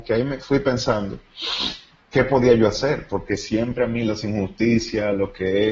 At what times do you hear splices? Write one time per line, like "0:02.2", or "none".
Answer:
none